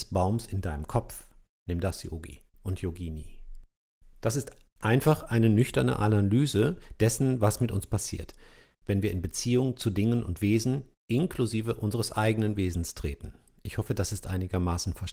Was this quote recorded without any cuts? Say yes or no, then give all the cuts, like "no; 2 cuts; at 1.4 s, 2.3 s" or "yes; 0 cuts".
yes; 0 cuts